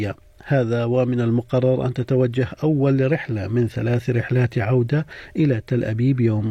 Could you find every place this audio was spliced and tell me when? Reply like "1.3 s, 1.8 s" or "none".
none